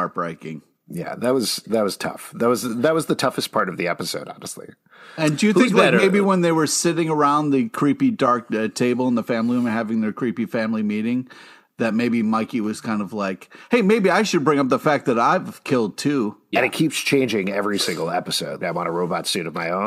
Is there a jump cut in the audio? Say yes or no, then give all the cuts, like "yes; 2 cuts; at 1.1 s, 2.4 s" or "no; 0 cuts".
yes; 2 cuts; at 16.5 s, 18.6 s